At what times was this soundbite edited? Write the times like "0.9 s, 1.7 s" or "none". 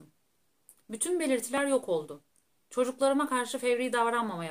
none